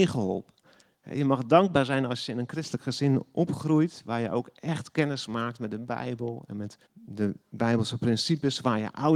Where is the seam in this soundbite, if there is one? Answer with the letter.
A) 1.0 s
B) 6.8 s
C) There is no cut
B